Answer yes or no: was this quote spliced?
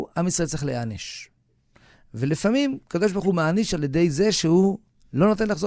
no